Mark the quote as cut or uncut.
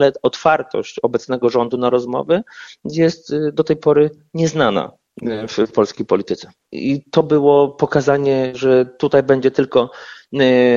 cut